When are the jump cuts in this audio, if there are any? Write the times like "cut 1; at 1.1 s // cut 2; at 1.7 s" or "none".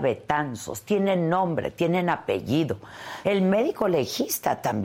cut 1; at 3.2 s